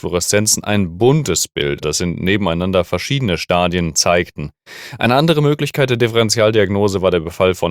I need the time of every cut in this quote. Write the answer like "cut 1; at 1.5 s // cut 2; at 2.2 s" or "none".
cut 1; at 1.8 s